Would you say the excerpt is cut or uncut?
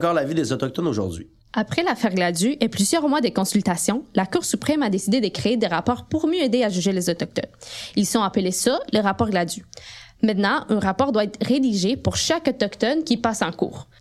uncut